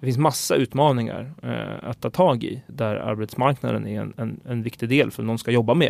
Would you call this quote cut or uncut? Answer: cut